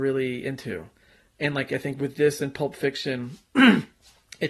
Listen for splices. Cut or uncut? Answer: uncut